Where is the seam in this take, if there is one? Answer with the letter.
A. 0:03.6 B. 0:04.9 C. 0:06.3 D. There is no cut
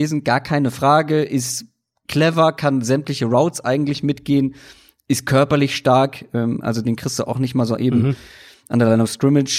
D